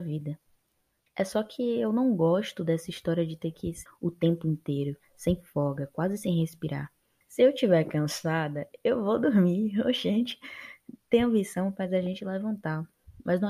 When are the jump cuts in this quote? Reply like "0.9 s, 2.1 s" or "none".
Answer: 3.9 s, 7.2 s